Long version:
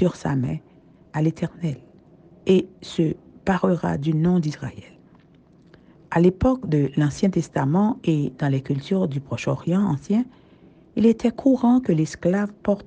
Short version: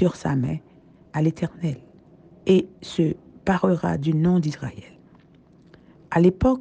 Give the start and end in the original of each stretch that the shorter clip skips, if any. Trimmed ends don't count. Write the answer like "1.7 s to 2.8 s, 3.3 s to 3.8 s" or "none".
none